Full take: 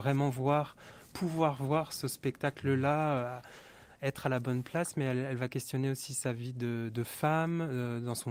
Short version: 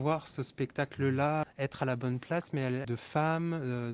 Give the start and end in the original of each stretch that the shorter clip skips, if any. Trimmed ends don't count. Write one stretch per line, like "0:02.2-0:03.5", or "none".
0:03.1-0:03.9
0:05.3-0:06.9